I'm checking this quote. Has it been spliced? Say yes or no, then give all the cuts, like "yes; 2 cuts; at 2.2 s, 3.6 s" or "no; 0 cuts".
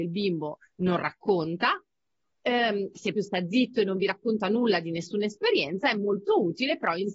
yes; 1 cut; at 3.1 s